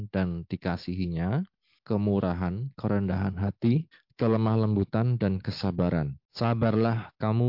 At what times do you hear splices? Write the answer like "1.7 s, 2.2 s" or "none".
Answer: 1.8 s